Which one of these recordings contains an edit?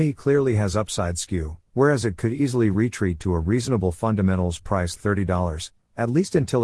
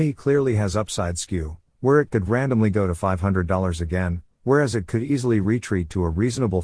first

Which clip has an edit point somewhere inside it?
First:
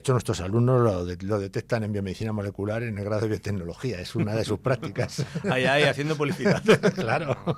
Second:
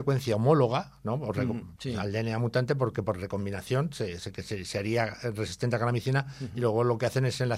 second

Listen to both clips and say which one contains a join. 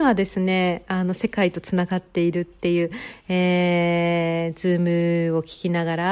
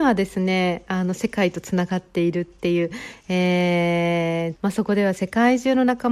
second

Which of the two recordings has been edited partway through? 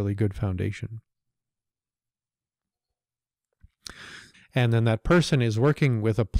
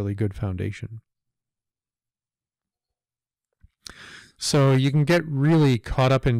first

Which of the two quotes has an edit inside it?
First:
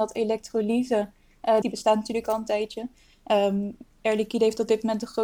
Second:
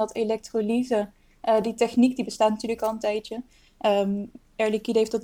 first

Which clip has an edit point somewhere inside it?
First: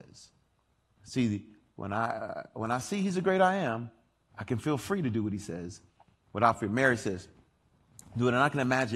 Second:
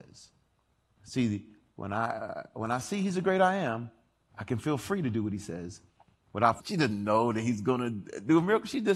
second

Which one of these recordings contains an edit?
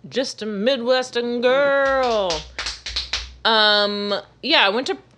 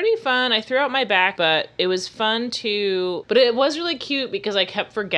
second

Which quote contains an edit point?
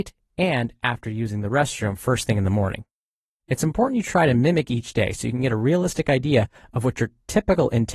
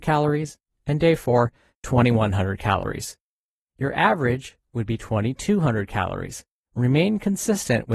second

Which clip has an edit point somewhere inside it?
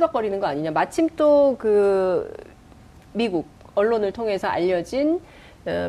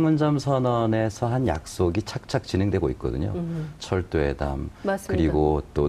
second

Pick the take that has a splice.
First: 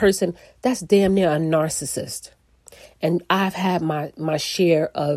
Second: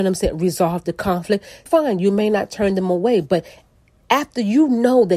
second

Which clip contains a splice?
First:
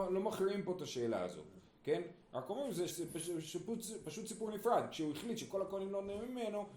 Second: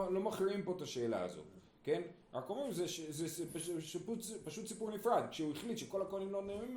first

